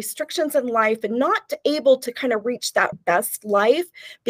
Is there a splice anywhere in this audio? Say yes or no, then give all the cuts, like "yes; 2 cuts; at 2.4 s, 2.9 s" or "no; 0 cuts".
yes; 1 cut; at 2.9 s